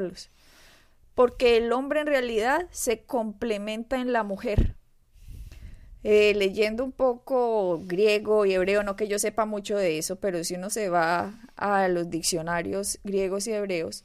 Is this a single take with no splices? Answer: yes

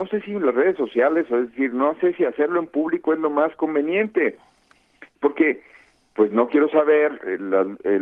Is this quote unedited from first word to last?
no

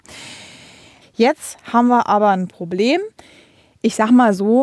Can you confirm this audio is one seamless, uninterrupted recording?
no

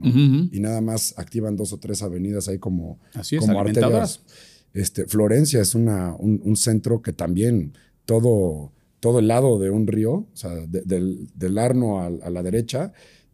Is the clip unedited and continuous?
no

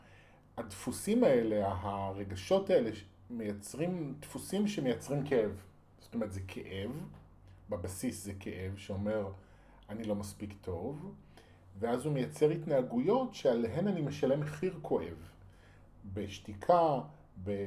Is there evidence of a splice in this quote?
no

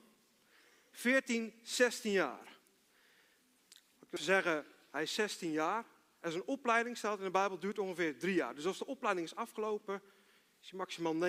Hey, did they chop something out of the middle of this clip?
yes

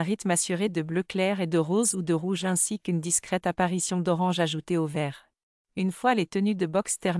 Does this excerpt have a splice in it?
yes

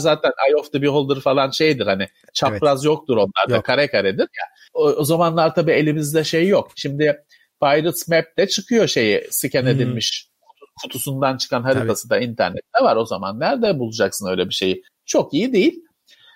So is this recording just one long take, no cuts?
no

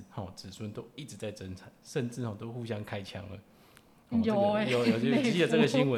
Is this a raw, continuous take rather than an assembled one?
yes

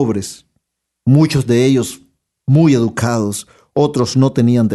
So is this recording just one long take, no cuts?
yes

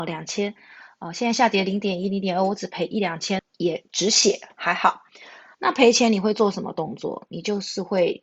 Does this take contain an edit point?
yes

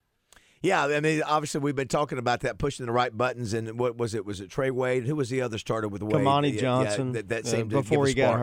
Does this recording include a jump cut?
no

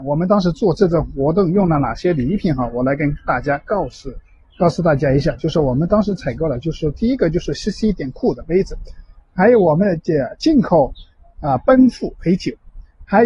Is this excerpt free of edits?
yes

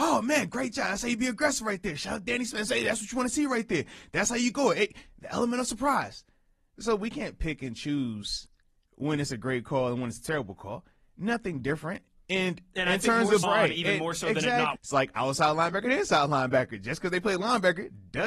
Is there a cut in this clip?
yes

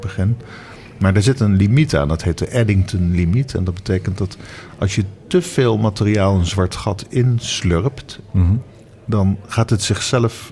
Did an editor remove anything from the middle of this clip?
no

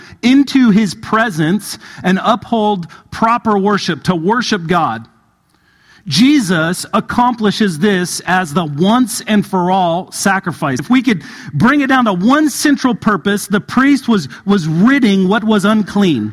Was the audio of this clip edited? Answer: yes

